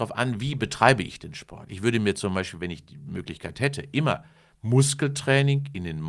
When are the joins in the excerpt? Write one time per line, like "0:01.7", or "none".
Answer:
none